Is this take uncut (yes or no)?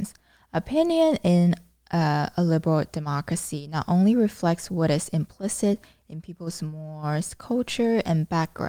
yes